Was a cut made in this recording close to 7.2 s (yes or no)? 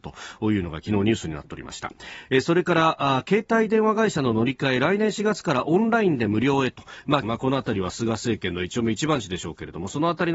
yes